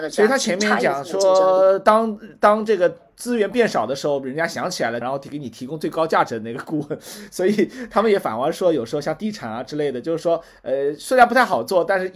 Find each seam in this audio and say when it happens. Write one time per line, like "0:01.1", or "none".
0:05.0